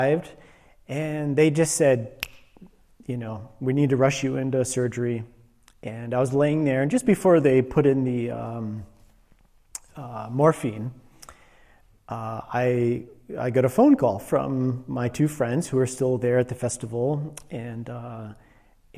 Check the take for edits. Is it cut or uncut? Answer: uncut